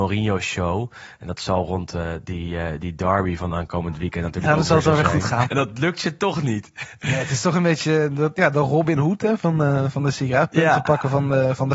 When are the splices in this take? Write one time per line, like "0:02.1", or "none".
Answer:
0:05.5